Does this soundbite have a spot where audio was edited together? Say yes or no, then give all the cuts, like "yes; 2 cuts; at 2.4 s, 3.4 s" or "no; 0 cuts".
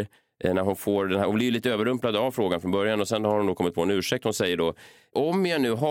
no; 0 cuts